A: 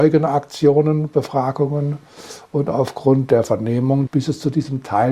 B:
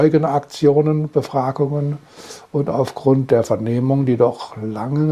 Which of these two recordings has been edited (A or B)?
A